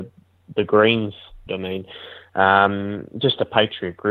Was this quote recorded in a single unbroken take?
no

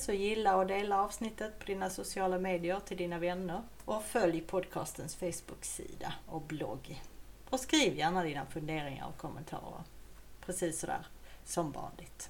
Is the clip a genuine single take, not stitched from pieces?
yes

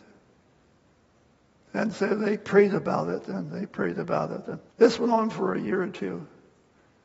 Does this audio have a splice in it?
yes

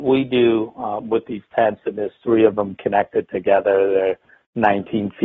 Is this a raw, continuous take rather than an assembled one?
yes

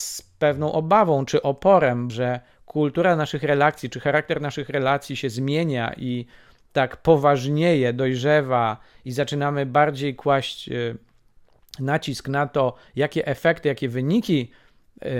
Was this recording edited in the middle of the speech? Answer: yes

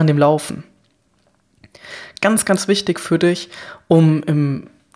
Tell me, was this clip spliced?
no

